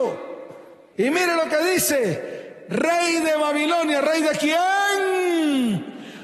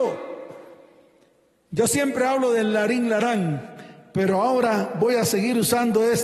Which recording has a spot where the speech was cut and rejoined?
first; 1 cut; at 0.9 s

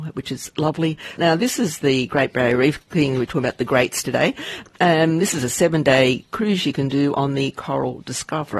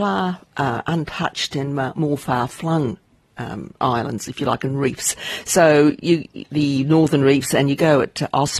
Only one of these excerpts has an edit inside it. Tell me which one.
first; 1 cut; at 1.2 s

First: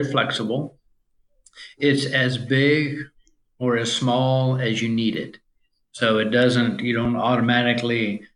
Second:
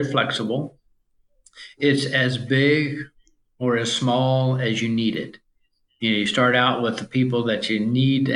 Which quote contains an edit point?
first; 1 cut; at 5.8 s

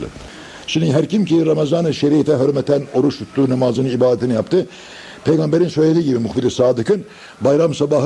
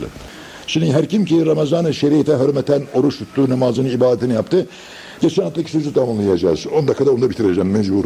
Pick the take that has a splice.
second; 1 cut; at 5.2 s

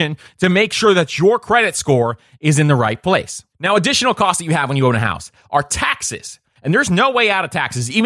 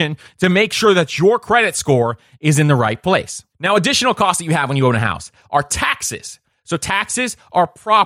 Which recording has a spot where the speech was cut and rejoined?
first; 1 cut; at 6.6 s

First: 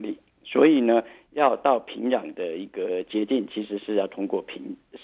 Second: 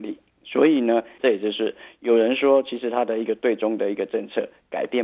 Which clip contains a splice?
second; 1 cut; at 1.2 s

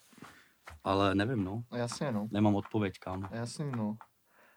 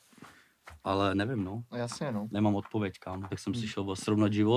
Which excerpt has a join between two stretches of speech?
second; 1 cut; at 3.3 s

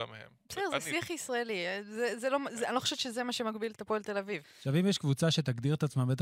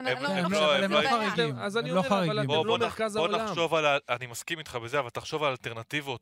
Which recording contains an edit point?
first; 1 cut; at 4.4 s

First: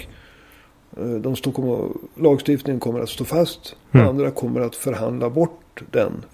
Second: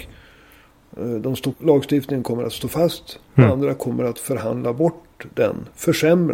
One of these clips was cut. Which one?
second; 1 cut; at 1.5 s

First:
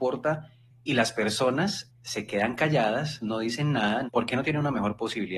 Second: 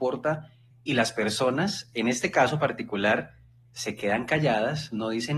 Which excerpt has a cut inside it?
first; 2 cuts; at 1.9 s, 4.1 s

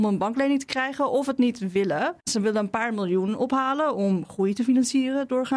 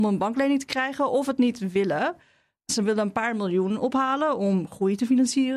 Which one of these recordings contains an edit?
first; 1 cut; at 2.2 s

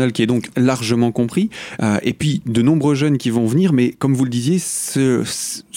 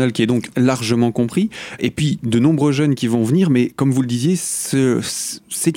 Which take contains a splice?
second; 1 cut; at 1.8 s

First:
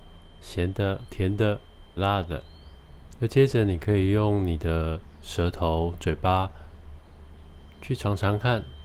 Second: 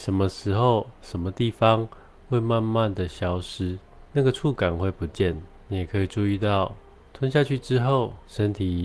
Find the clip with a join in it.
first; 1 cut; at 2.0 s

